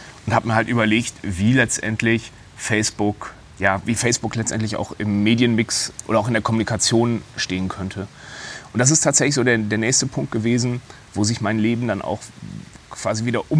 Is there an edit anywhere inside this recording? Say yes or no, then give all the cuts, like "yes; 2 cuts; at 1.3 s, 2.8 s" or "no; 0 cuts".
no; 0 cuts